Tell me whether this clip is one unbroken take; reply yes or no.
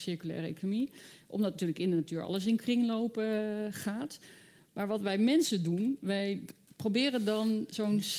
yes